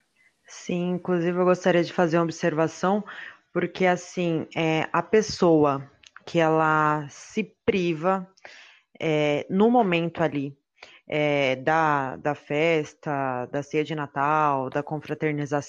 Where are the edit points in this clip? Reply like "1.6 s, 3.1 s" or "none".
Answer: none